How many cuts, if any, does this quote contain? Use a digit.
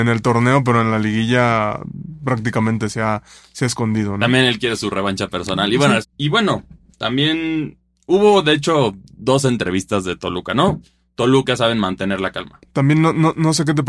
2